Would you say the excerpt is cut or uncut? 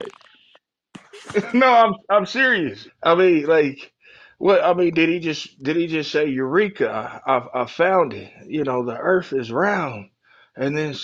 cut